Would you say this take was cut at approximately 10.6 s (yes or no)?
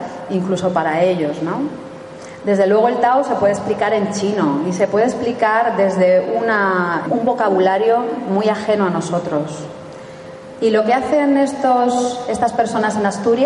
yes